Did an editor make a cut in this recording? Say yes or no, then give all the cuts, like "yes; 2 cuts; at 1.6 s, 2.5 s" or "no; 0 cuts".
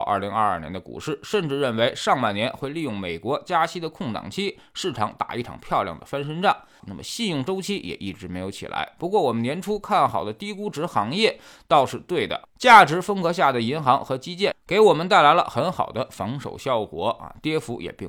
yes; 1 cut; at 6.8 s